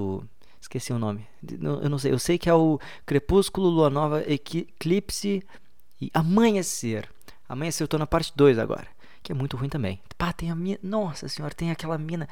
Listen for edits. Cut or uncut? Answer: uncut